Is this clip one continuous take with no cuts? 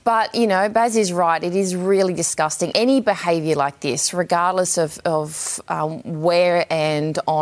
yes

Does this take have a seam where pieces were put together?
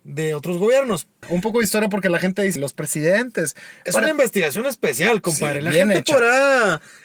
yes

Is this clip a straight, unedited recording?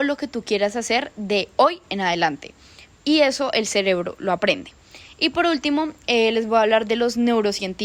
yes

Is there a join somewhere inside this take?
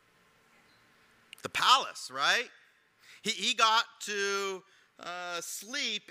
no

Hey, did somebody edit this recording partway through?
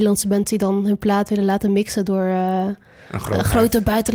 no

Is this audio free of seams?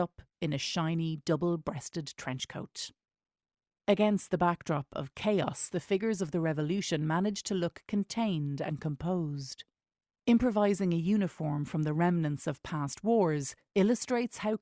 yes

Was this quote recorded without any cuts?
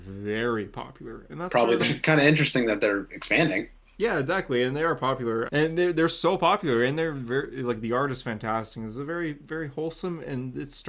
no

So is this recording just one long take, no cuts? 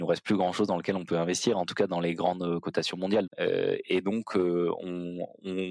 no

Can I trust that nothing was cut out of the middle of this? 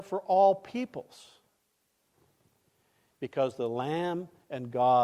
no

